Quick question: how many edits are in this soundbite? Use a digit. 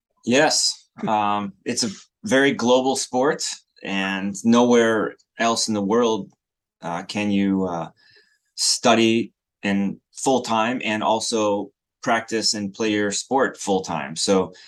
0